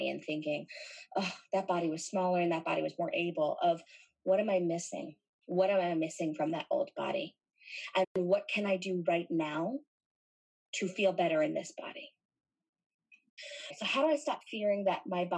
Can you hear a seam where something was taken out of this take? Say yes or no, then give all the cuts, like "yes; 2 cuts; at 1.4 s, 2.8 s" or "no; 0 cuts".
no; 0 cuts